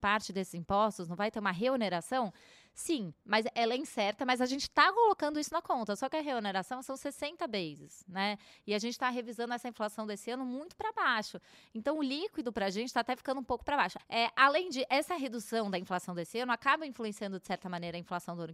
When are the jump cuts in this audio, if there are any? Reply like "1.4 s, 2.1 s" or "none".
14.0 s